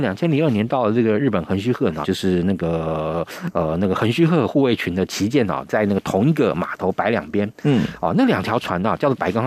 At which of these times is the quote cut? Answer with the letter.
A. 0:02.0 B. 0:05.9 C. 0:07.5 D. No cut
A